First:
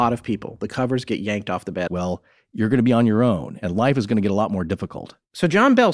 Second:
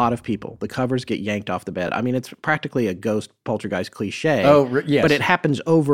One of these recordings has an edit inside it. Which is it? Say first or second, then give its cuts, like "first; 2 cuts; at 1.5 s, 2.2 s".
first; 1 cut; at 1.9 s